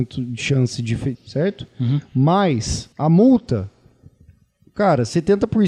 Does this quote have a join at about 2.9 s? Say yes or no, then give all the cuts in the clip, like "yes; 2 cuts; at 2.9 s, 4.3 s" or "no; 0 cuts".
yes; 2 cuts; at 1.1 s, 2.9 s